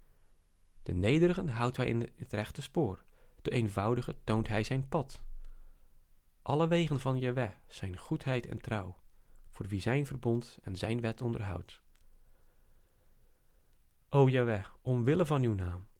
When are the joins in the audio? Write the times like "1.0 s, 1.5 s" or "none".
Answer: none